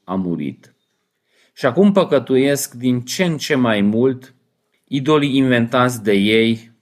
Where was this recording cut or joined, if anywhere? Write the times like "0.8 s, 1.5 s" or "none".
4.7 s